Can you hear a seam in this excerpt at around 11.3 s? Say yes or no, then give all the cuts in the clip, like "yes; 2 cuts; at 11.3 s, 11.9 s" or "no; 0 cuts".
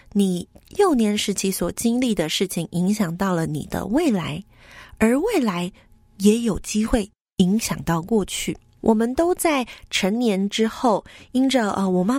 no; 1 cut; at 8.8 s